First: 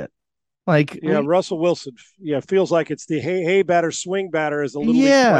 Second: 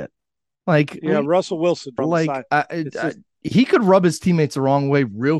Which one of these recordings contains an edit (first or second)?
second